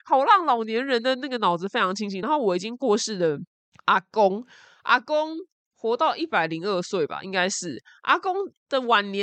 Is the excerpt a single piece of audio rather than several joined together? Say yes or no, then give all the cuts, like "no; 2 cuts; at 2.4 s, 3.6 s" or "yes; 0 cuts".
yes; 0 cuts